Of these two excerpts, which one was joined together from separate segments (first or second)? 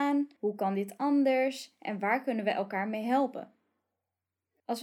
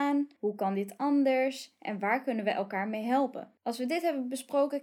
second